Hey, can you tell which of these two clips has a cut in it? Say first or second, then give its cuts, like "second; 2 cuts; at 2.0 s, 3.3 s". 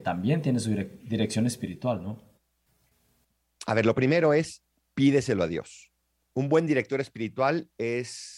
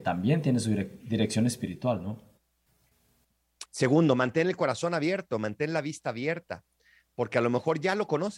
second; 1 cut; at 3.7 s